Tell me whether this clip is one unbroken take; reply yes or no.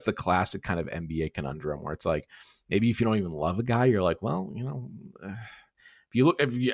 yes